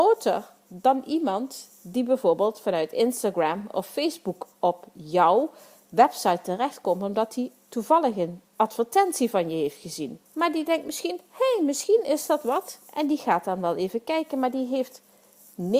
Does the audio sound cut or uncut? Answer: cut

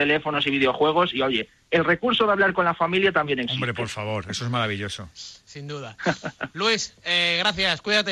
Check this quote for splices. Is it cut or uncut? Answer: uncut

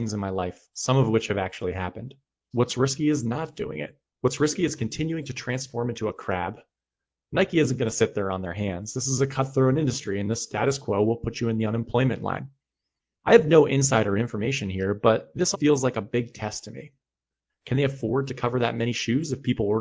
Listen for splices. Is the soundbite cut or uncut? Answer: cut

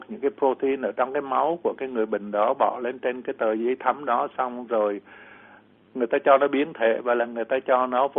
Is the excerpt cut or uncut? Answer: uncut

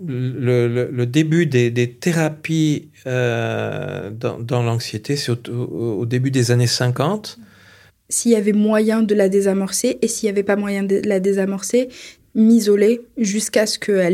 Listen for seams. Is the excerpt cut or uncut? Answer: cut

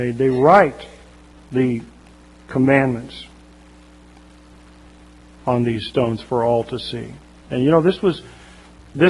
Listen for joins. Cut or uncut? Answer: uncut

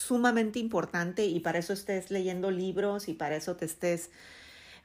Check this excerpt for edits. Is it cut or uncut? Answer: uncut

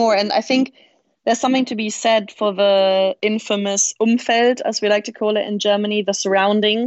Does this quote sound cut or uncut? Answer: uncut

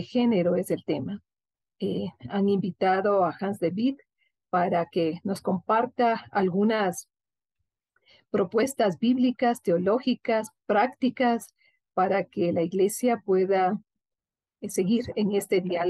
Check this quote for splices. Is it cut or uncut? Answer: uncut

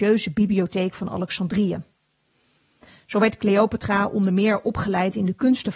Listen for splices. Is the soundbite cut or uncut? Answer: uncut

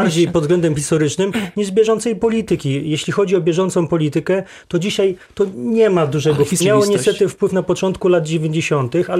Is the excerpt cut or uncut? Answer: cut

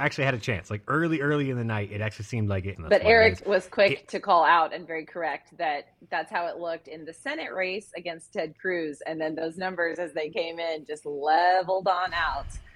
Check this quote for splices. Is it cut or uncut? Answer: cut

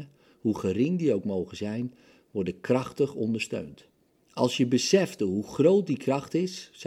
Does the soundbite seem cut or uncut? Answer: uncut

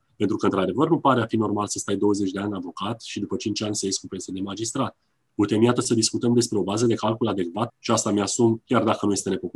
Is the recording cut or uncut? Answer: cut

